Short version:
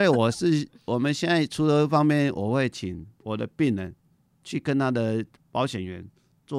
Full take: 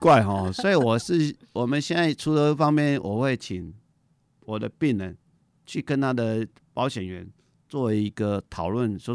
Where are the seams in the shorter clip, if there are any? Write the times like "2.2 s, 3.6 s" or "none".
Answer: 3.1 s

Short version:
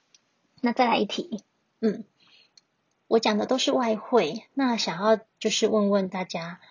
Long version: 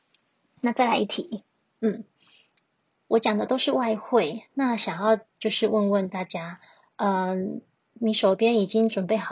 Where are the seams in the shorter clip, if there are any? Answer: none

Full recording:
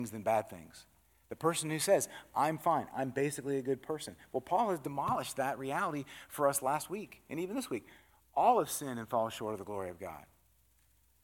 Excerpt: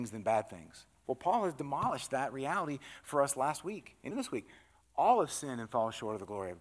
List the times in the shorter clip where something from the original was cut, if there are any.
1.0 s, 4.1 s

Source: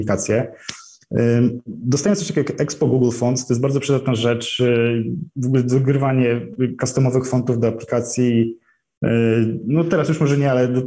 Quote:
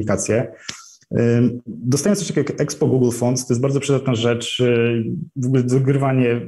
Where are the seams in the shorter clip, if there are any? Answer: none

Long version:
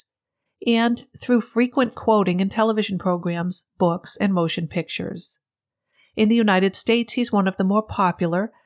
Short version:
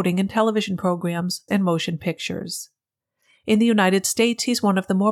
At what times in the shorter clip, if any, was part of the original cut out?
1.5 s

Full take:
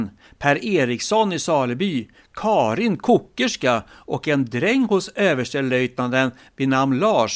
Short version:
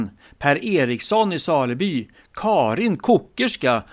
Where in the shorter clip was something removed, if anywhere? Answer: none

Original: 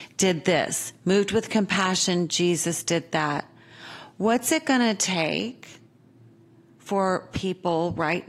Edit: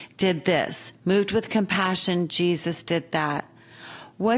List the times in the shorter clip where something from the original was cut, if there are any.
none

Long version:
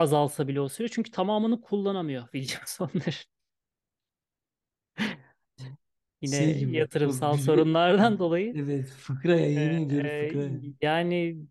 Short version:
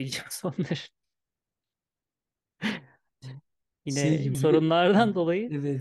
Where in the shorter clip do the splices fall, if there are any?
4.3 s

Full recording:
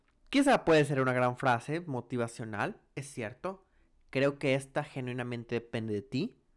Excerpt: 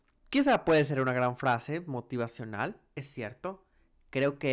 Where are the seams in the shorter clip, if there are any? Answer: none

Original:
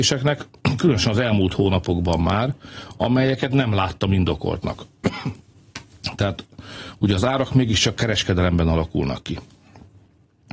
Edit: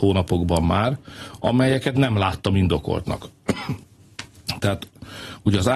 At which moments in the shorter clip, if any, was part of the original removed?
none

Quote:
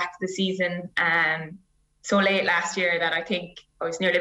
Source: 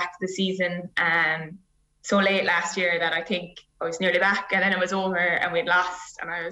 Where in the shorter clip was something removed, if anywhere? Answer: none

